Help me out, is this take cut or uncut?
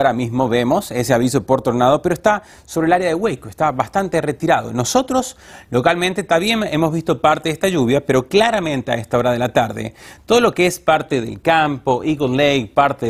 uncut